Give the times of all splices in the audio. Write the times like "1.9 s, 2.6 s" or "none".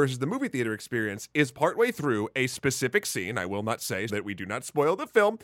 4.1 s